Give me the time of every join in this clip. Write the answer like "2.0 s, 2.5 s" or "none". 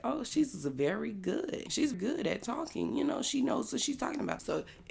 1.9 s